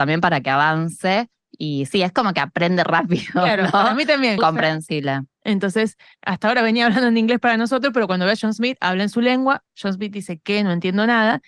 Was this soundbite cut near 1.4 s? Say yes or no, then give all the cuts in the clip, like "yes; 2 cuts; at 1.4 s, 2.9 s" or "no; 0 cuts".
no; 1 cut; at 4.4 s